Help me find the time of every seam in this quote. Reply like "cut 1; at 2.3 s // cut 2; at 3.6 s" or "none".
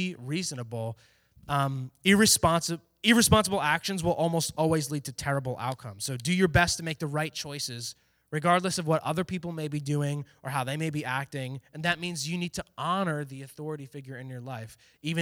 none